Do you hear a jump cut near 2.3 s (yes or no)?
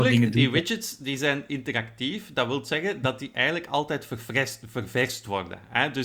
no